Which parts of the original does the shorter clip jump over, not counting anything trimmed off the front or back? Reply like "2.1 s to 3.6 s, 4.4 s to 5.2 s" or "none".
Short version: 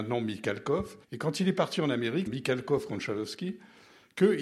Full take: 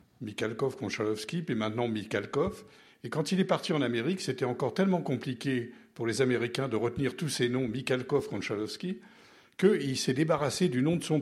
2.7 s to 2.9 s, 4.2 s to 7.7 s